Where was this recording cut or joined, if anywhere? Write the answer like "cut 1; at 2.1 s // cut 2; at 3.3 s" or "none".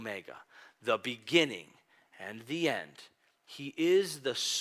none